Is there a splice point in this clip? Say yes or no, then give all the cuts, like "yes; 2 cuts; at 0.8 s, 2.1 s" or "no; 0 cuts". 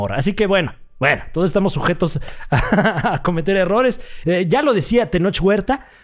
yes; 1 cut; at 4.2 s